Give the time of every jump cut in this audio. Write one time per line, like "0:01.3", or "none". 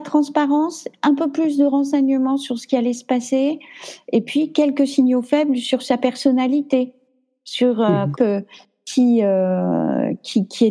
0:08.1

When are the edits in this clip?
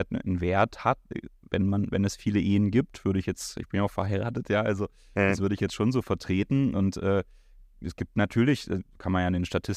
none

